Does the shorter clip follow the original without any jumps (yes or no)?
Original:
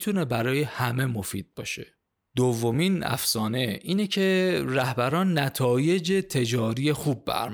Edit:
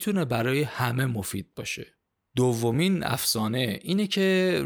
yes